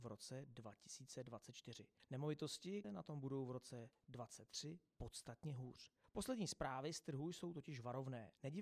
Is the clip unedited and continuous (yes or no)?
no